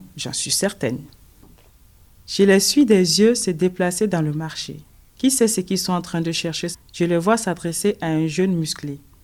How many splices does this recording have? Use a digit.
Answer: 2